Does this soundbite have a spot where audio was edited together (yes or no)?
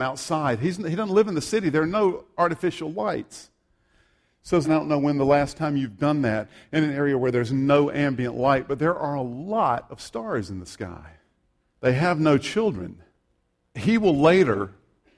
yes